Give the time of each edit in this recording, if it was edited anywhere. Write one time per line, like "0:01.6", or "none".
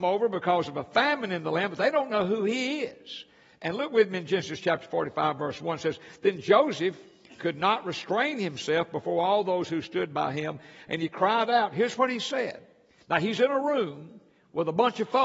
none